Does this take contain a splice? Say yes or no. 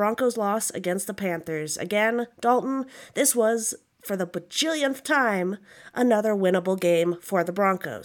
no